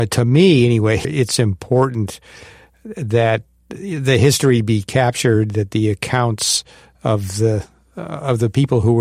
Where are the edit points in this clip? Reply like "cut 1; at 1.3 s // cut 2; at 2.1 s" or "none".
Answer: cut 1; at 1.0 s